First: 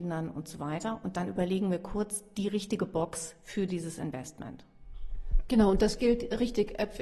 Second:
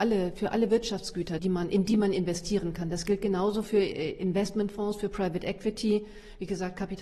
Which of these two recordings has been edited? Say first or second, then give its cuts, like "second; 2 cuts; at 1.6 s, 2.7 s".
second; 1 cut; at 1.4 s